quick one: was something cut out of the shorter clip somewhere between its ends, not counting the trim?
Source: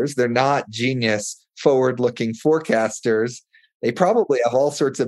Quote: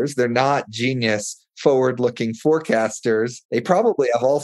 yes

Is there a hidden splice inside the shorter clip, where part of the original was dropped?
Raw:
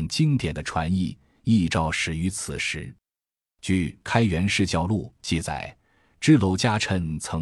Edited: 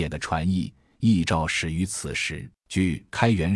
yes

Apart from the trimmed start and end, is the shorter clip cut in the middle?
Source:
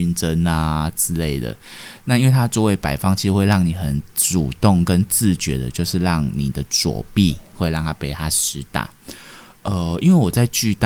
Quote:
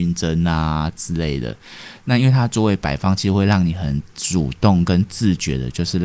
no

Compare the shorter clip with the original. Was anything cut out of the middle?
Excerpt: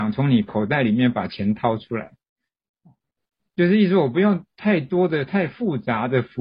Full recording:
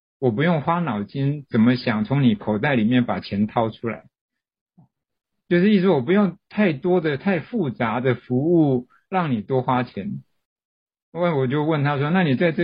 no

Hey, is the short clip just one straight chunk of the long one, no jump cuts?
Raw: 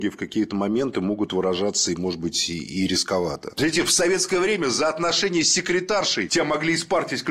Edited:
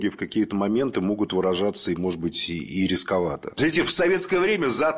yes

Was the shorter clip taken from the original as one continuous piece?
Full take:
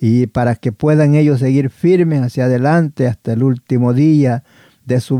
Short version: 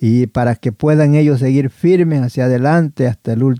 yes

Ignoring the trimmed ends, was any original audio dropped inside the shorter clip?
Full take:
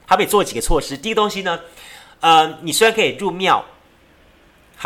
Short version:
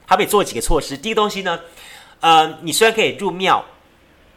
no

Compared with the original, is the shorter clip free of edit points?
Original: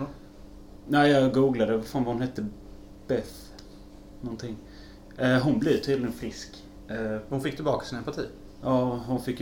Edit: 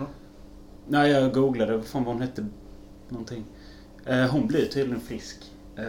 no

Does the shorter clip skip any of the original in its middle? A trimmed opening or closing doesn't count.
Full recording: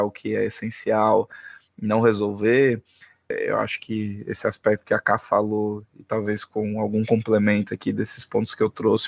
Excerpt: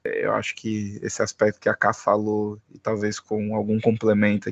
no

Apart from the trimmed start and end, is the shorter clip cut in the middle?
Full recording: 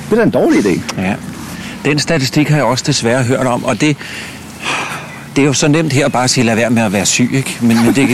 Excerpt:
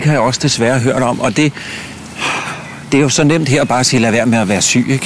no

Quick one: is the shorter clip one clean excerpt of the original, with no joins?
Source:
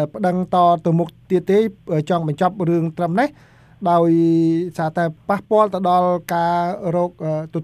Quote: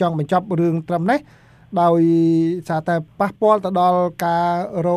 yes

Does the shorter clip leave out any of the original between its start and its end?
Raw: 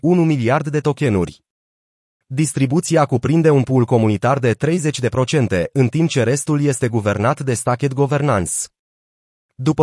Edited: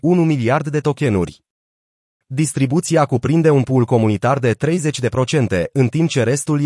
no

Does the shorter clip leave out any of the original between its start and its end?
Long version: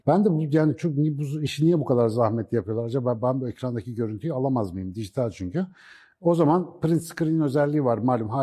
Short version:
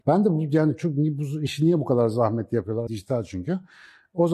yes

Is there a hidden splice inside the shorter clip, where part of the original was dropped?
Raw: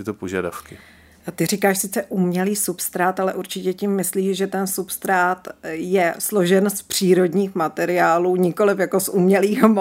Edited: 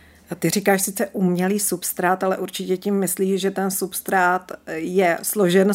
no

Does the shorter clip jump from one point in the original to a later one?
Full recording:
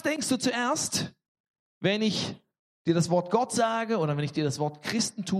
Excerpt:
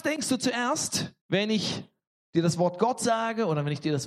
yes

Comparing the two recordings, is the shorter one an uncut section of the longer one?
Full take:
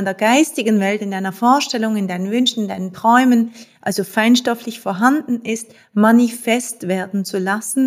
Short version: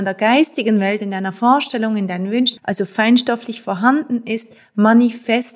no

